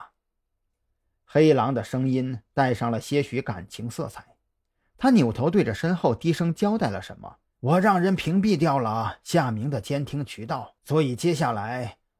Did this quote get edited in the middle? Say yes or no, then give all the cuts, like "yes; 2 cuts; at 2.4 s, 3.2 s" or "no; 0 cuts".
yes; 2 cuts; at 7.5 s, 10.8 s